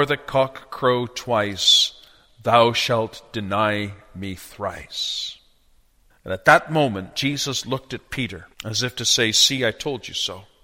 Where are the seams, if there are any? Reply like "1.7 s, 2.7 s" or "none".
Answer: 6.1 s, 8.5 s